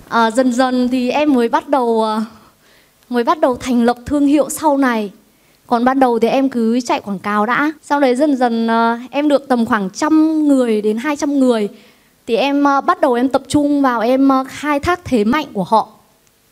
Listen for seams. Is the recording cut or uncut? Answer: cut